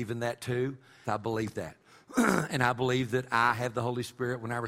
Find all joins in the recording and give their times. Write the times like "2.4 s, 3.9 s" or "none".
1.0 s

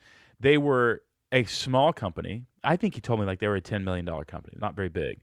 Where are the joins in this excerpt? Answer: none

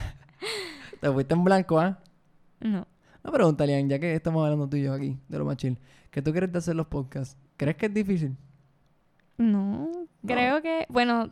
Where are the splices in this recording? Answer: 7.5 s

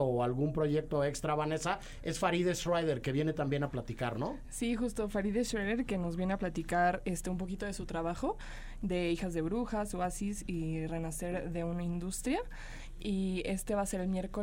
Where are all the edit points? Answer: none

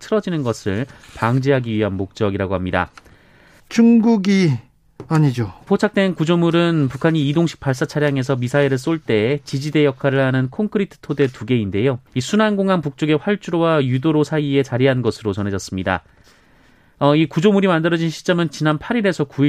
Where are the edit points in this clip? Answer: 3.6 s, 5.7 s, 12.1 s

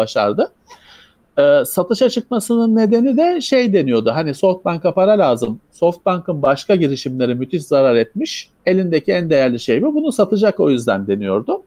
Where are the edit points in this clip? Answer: 8.6 s

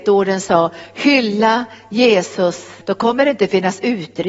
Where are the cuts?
2.8 s

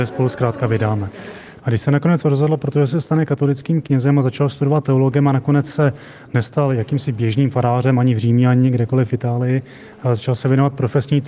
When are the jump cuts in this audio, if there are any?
1.6 s

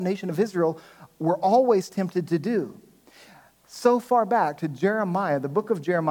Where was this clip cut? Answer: none

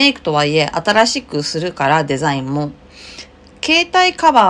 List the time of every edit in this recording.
none

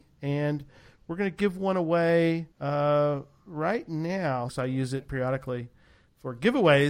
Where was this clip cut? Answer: 2.5 s, 4.5 s

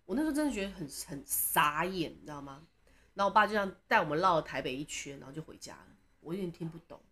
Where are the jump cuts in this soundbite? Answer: 6.2 s

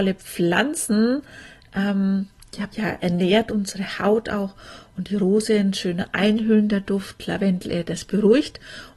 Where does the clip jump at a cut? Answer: 2.7 s

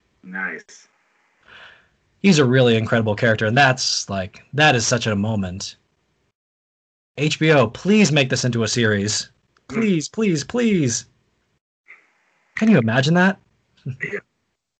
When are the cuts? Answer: none

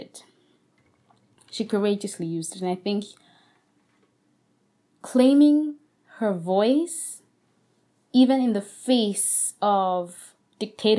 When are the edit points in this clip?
none

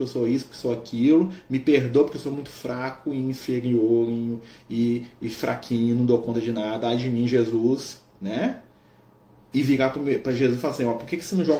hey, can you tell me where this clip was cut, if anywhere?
none

